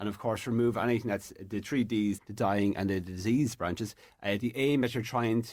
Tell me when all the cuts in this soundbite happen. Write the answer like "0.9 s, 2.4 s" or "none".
2.2 s, 4.1 s